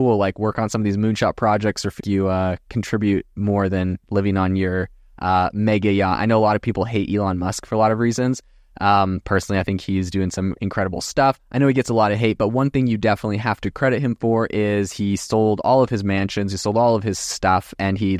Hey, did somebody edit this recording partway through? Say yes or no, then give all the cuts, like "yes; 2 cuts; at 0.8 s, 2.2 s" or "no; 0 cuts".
yes; 1 cut; at 2.0 s